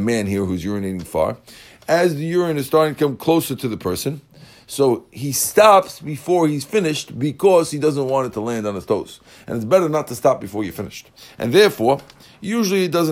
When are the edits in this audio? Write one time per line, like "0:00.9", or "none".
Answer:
none